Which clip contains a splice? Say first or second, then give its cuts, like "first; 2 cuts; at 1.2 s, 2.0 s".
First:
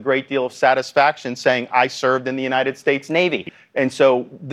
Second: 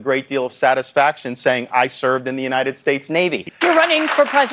second; 1 cut; at 3.6 s